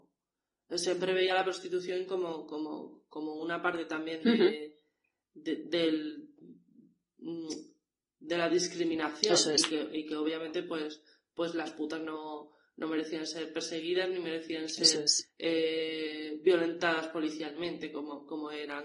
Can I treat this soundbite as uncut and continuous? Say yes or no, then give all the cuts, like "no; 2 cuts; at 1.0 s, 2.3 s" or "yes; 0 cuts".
yes; 0 cuts